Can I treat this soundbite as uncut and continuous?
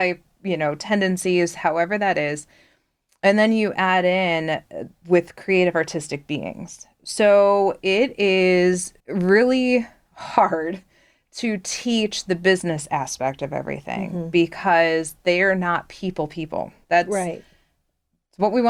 no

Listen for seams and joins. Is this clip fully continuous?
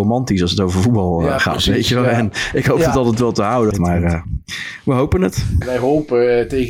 no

